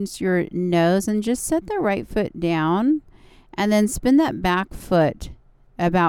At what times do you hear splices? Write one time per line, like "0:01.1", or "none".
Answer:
none